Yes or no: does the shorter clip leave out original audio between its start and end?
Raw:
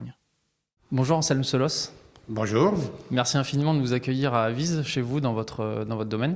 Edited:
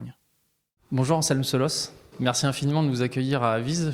yes